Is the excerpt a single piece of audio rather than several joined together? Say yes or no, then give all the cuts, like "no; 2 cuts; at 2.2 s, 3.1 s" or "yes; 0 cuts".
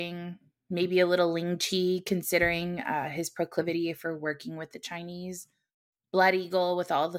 yes; 0 cuts